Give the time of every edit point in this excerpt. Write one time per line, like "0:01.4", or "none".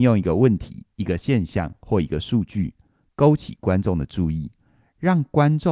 none